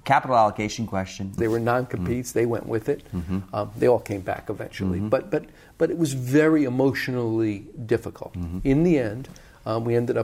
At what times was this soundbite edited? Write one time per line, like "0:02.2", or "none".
0:01.4